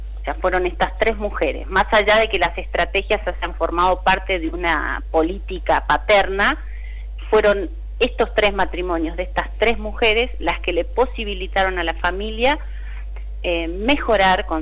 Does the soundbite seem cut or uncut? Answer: uncut